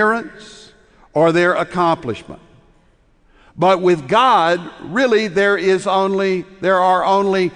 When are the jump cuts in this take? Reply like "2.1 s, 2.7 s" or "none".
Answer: none